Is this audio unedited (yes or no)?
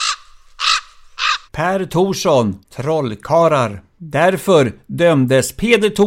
no